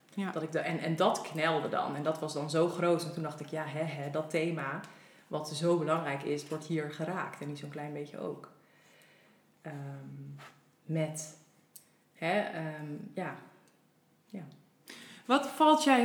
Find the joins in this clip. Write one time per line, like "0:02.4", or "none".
none